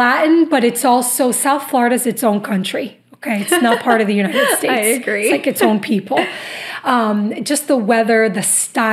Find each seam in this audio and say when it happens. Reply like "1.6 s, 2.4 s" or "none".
none